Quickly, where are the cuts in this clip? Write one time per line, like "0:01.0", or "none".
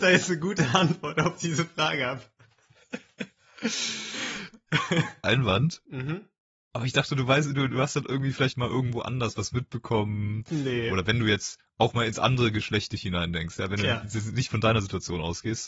0:05.2